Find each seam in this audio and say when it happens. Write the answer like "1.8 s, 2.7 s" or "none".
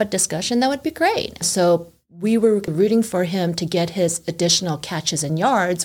1.4 s, 2.7 s